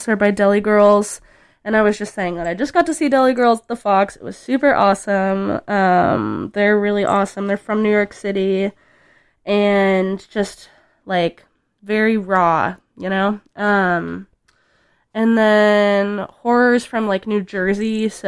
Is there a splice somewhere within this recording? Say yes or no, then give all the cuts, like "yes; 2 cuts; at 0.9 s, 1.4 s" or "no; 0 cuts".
no; 0 cuts